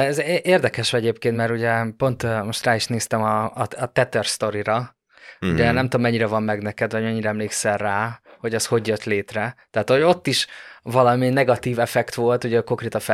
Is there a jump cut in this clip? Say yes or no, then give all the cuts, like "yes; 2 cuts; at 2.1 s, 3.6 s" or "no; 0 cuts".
no; 0 cuts